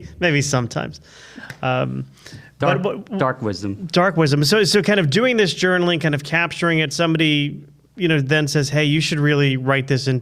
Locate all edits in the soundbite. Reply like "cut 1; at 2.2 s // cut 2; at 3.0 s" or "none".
none